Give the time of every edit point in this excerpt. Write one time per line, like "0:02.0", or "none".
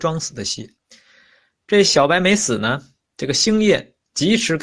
none